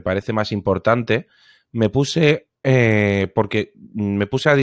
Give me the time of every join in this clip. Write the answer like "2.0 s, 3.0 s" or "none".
2.6 s